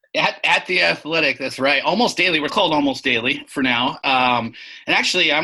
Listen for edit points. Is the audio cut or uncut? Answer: cut